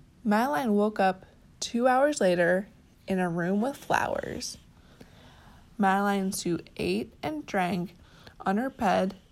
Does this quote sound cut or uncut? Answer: uncut